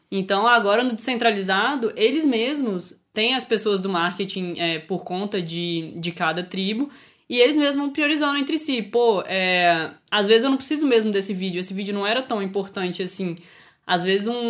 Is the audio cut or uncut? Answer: uncut